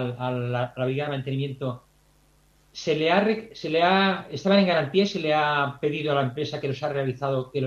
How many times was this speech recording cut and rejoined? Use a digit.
0